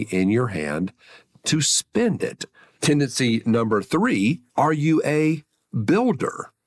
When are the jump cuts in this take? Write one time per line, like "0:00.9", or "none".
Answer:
0:02.8
0:04.5